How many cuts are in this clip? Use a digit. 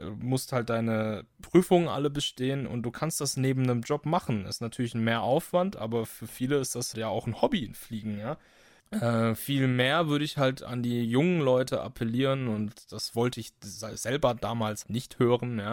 3